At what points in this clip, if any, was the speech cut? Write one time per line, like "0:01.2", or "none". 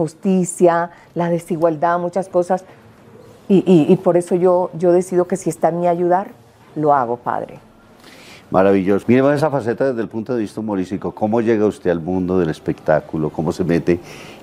0:09.0